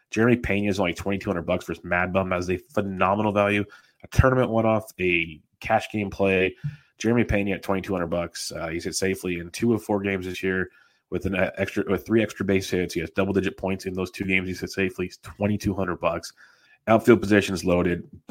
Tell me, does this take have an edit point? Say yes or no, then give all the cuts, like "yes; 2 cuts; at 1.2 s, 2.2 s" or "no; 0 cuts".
yes; 1 cut; at 16.7 s